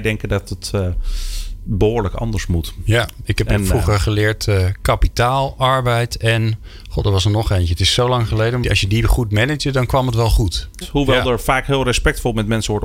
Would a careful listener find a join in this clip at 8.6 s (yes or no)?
yes